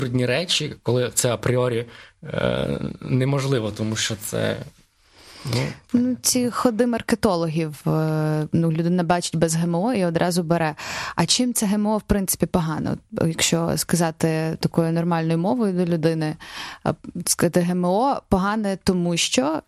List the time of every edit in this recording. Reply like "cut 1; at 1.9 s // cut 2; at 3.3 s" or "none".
none